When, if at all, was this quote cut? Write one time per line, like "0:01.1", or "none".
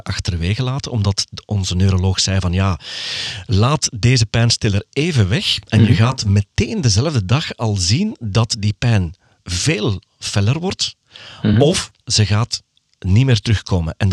none